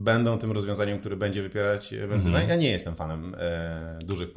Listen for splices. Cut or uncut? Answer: uncut